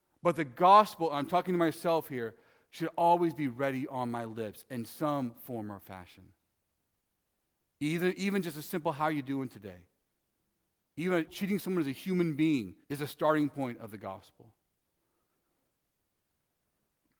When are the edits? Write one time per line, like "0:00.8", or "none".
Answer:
0:11.3
0:12.8